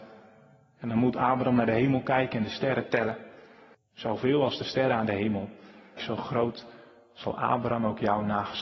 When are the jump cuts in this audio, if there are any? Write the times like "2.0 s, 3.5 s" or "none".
3.7 s, 6.0 s